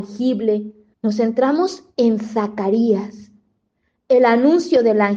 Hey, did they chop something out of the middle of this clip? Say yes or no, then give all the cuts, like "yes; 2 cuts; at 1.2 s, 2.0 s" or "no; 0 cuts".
yes; 1 cut; at 0.9 s